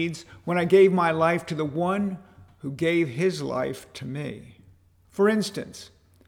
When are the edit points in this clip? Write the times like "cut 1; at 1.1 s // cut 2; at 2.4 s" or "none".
cut 1; at 5.0 s